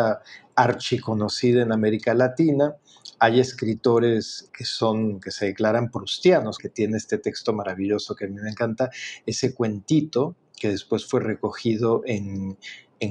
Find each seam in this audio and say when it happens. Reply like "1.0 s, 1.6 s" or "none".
4.5 s, 6.6 s